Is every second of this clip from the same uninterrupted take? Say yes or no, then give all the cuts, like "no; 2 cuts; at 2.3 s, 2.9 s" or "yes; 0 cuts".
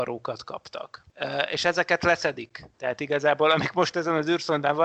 no; 1 cut; at 2.7 s